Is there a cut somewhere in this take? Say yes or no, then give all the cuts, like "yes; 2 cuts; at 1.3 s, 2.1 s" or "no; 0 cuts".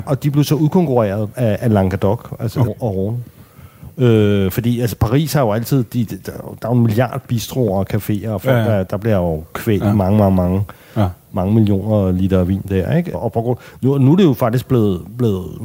yes; 2 cuts; at 2.7 s, 13.1 s